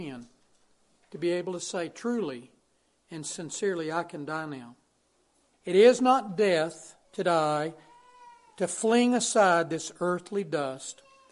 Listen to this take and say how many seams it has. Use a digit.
2